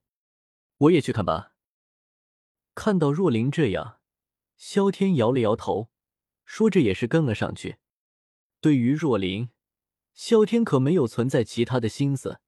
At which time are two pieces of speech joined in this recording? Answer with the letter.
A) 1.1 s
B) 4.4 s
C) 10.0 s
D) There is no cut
A